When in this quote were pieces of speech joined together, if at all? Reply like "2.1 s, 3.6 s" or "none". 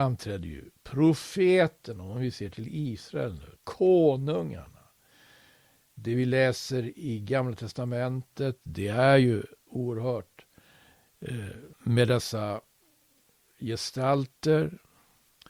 3.6 s, 11.7 s